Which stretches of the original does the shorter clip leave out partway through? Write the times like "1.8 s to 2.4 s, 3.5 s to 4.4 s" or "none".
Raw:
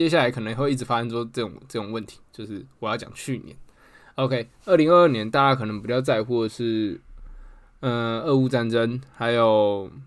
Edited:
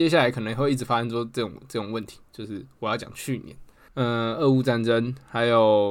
3.9 s to 7.7 s